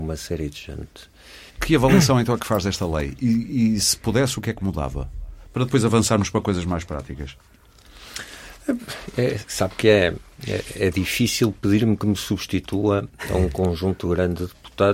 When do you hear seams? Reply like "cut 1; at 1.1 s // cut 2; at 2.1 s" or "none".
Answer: cut 1; at 1.5 s